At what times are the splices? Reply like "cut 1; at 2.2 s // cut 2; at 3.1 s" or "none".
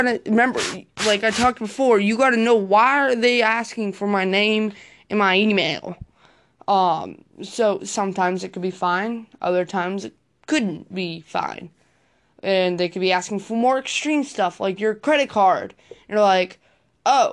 none